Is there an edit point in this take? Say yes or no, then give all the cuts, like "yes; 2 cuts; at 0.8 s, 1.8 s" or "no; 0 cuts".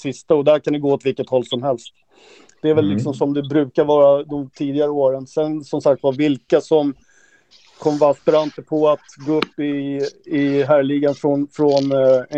no; 0 cuts